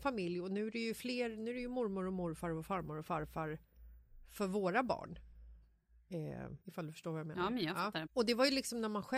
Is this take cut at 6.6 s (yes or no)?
yes